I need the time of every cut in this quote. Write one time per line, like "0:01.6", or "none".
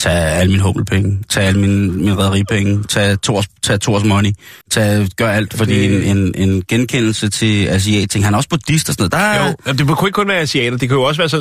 0:04.6